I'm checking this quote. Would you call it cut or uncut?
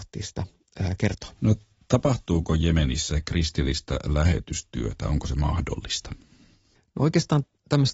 uncut